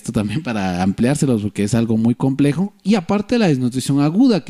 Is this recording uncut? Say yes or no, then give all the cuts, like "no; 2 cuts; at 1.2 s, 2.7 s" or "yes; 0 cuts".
yes; 0 cuts